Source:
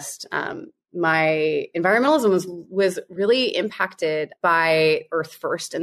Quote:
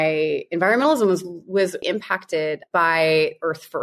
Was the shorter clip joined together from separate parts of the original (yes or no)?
yes